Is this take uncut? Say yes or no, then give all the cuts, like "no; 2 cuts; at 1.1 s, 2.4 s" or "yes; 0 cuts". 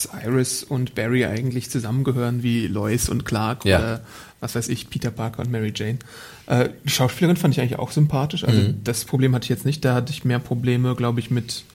yes; 0 cuts